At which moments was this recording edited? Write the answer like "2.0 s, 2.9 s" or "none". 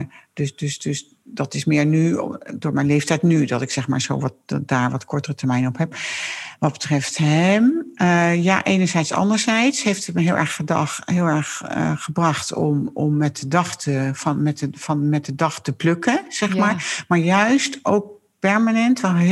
none